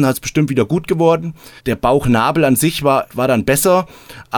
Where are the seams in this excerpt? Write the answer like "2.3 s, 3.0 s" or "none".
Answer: 1.6 s, 3.1 s